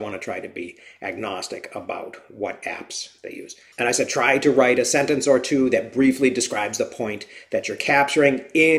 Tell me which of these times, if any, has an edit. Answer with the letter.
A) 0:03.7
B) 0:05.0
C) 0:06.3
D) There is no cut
D